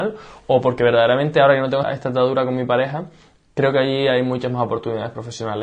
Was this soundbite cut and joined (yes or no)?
yes